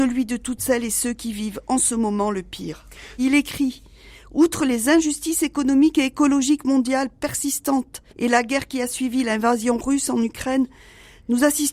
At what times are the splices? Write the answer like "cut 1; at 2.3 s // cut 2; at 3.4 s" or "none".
cut 1; at 3.2 s // cut 2; at 8.1 s